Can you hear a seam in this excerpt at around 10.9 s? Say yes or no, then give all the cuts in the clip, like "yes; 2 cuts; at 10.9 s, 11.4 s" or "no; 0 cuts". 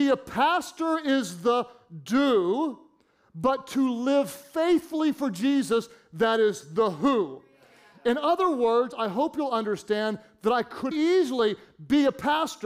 yes; 1 cut; at 10.9 s